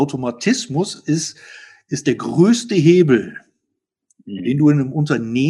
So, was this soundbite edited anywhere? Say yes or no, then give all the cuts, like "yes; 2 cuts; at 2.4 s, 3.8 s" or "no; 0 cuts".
no; 0 cuts